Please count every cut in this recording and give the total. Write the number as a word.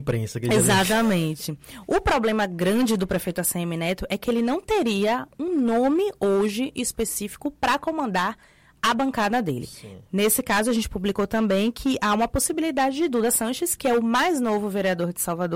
zero